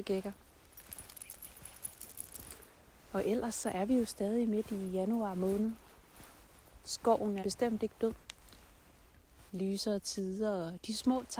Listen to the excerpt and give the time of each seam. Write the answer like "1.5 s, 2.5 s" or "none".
7.4 s, 9.5 s